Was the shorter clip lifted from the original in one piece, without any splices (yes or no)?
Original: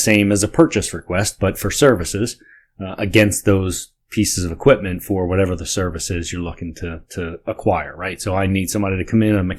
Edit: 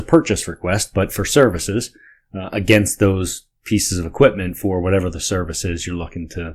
yes